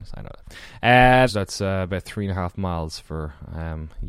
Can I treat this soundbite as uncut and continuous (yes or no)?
no